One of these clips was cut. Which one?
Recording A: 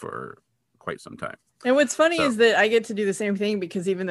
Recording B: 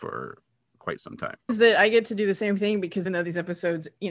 B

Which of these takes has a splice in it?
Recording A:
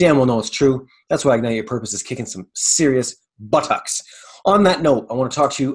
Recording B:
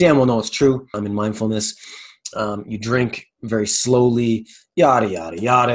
B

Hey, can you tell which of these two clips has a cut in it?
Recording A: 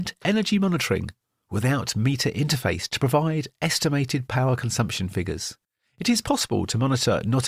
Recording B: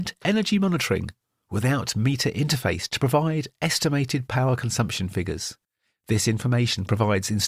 B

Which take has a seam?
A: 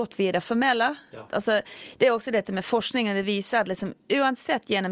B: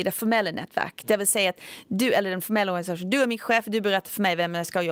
A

